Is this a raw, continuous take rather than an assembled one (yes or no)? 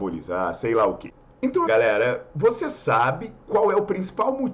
no